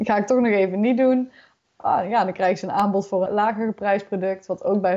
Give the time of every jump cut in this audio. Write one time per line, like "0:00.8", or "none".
0:03.3